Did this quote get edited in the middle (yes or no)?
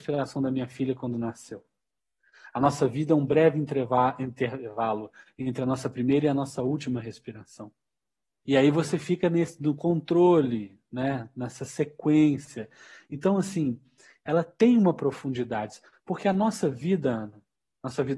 yes